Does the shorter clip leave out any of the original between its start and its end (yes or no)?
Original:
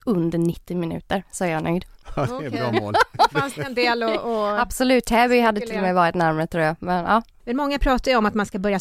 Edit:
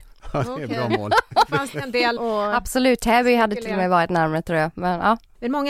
yes